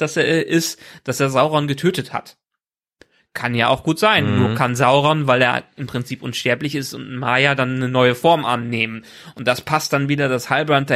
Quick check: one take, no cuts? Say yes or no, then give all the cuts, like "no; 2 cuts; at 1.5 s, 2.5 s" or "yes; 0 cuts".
yes; 0 cuts